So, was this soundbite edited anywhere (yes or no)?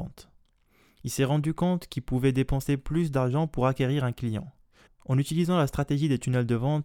yes